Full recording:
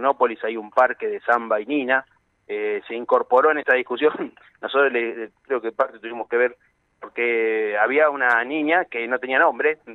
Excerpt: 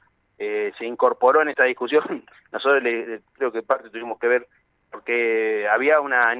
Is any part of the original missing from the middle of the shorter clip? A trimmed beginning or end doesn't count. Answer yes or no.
no